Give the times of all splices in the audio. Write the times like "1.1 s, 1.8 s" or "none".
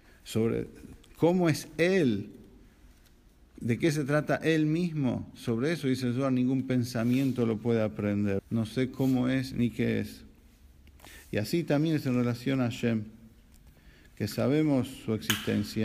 8.4 s